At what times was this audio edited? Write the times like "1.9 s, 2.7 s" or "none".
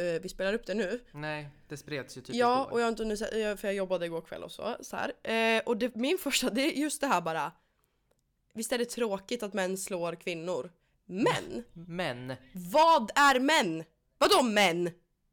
none